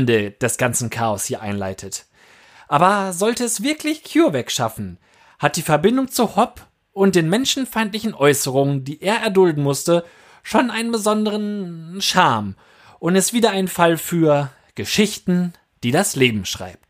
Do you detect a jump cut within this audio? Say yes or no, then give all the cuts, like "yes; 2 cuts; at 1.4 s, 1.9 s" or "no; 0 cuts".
no; 0 cuts